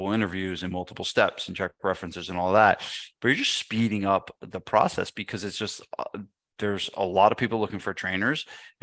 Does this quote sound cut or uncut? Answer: uncut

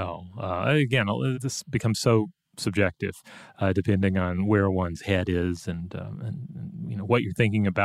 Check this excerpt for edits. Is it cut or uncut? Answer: cut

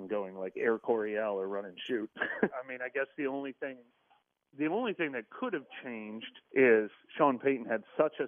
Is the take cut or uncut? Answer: cut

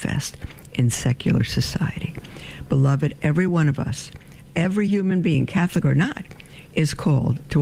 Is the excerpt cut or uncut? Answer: uncut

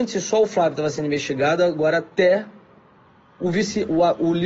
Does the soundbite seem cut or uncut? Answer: uncut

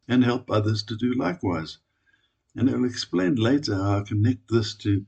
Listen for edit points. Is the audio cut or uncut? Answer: uncut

